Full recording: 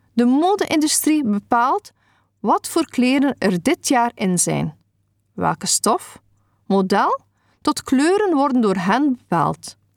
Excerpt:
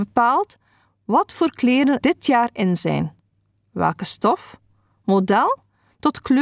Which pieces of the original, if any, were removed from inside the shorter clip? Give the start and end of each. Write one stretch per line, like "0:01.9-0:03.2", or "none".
0:03.4-0:03.6